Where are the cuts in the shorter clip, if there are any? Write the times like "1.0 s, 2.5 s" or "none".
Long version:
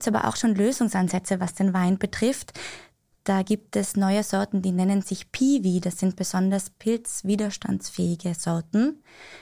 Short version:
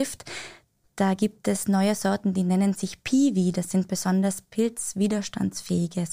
none